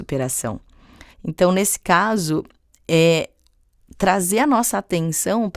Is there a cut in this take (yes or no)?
yes